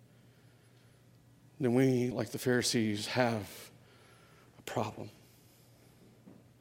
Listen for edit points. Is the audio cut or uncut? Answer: uncut